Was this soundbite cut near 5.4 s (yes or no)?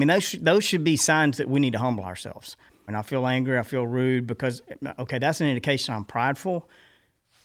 no